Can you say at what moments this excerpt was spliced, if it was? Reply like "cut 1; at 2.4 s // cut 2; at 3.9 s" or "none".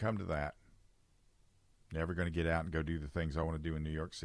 cut 1; at 1.9 s